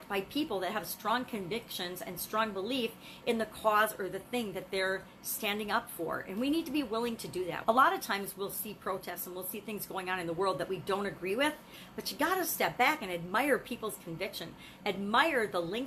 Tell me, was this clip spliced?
yes; 1 cut; at 7.6 s

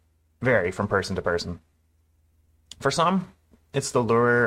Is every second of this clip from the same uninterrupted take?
yes; 0 cuts

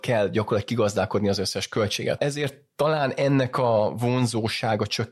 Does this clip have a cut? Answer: yes; 1 cut; at 2.2 s

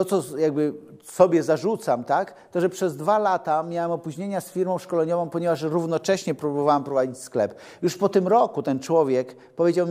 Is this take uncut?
yes; 0 cuts

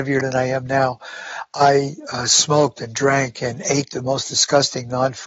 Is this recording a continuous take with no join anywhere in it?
yes; 0 cuts

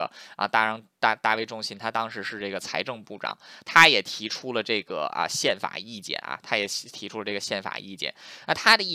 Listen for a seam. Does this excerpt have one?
no; 0 cuts

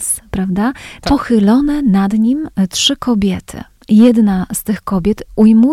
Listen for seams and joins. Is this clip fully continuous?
no; 1 cut; at 1.1 s

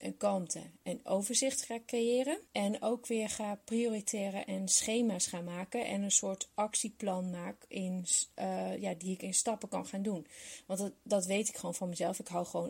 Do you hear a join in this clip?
yes; 1 cut; at 2.5 s

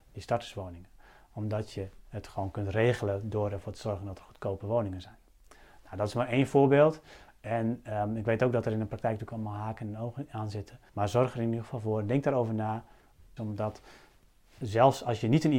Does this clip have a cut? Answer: yes; 2 cuts; at 10.9 s, 13.4 s

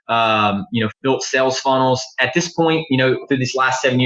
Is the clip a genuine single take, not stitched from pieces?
no; 1 cut; at 0.9 s

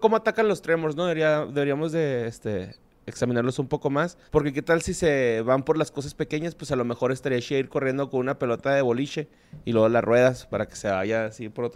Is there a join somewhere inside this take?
yes; 1 cut; at 4.3 s

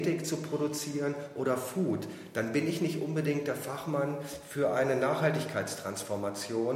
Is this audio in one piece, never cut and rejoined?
yes; 0 cuts

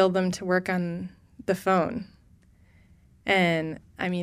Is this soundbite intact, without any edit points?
yes; 0 cuts

